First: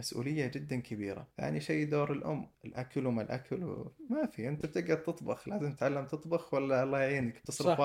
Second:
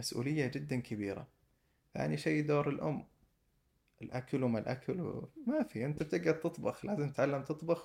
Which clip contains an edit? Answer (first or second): first